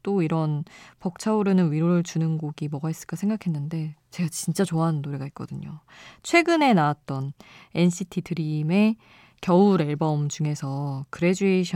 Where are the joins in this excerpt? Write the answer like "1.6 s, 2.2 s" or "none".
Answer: none